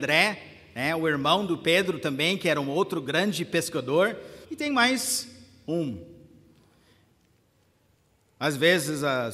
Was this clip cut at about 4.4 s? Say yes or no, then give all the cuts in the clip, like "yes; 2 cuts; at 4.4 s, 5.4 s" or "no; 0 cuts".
yes; 1 cut; at 4.4 s